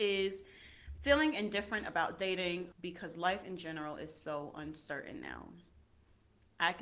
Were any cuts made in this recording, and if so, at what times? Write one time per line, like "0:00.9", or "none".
0:02.7